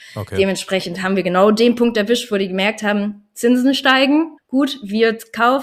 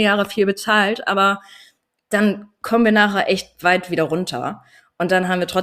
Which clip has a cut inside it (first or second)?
first